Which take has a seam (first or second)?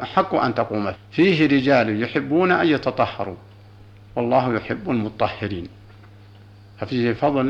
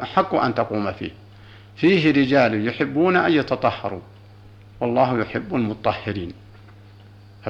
first